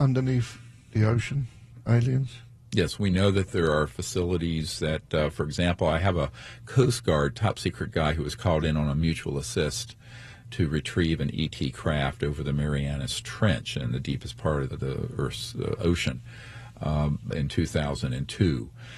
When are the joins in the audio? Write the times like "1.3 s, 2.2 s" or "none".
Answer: 14.7 s, 17.3 s